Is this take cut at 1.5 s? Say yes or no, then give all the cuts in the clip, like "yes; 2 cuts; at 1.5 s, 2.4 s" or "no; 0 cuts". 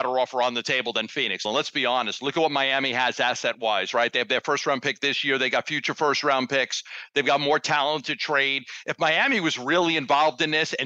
yes; 1 cut; at 1.5 s